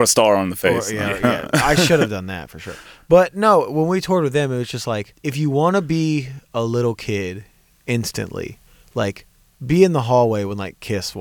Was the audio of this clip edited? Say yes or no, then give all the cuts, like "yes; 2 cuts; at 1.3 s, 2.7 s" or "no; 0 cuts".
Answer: no; 0 cuts